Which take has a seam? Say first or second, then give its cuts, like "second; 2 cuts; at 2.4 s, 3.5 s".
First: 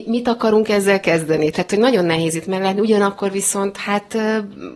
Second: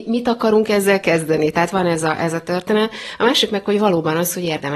first; 1 cut; at 1.5 s